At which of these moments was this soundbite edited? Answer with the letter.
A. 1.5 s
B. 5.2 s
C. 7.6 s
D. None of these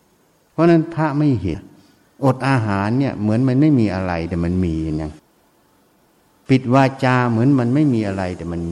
A